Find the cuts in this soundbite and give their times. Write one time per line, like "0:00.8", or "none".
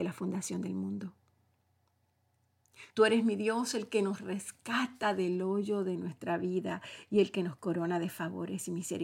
0:02.9